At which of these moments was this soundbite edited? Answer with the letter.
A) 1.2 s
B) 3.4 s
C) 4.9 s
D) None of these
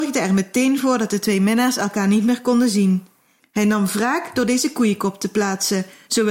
B